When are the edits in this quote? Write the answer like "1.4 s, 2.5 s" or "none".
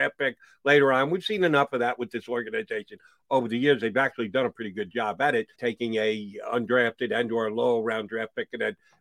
5.5 s